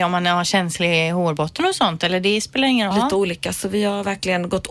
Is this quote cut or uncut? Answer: cut